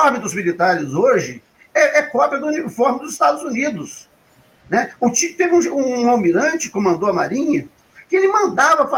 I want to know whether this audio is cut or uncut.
uncut